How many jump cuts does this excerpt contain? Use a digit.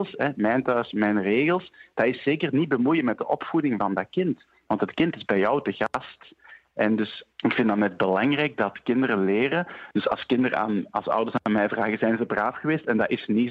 2